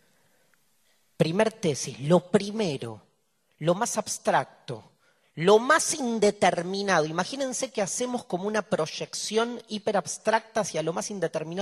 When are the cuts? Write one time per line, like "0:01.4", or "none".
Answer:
none